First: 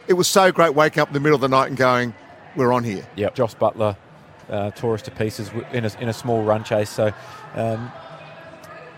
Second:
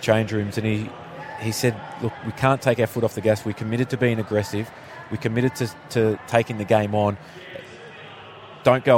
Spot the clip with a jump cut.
first; 1 cut; at 3.3 s

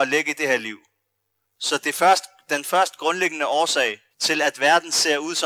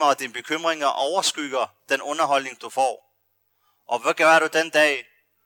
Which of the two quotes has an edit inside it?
first; 2 cuts; at 1.4 s, 4.1 s

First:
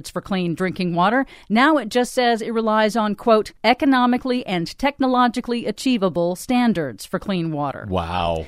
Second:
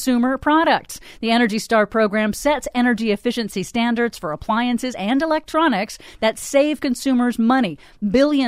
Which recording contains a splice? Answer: first; 1 cut; at 3.6 s

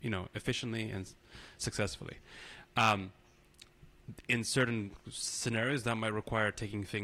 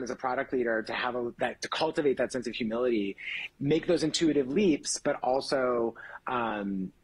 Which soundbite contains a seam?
second; 1 cut; at 3.5 s

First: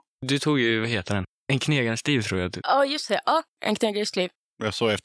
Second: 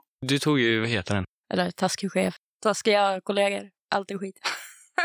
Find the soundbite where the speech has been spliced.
second; 1 cut; at 1.4 s

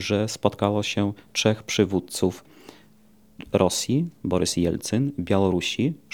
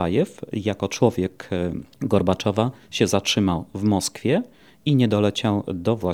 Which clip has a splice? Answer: second; 1 cut; at 1.9 s

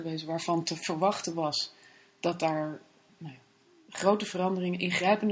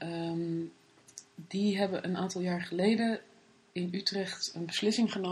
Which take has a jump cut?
first; 1 cut; at 3.1 s

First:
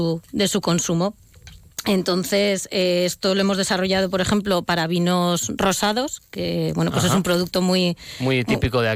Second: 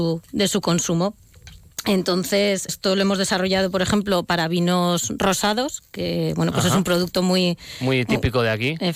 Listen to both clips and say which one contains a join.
second; 1 cut; at 2.7 s

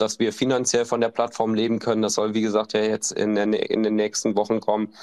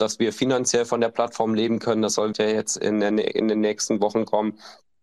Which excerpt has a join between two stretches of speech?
second; 1 cut; at 2.3 s

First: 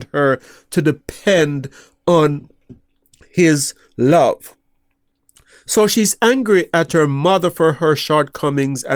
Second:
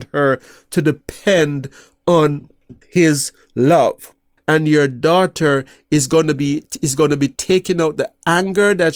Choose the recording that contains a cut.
second; 2 cuts; at 2.8 s, 4.4 s

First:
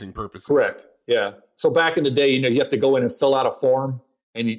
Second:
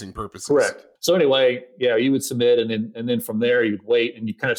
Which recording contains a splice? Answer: second; 1 cut; at 1.0 s

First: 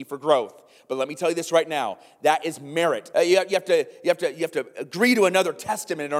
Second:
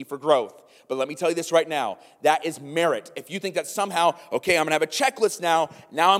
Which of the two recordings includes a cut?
first; 1 cut; at 3.1 s

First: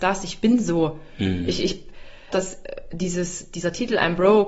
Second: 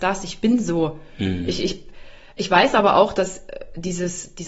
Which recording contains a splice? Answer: first; 1 cut; at 2.3 s

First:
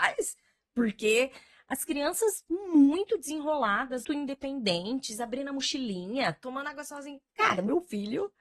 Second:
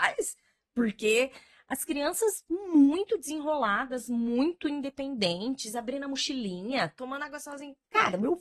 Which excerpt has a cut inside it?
first; 1 cut; at 4.0 s

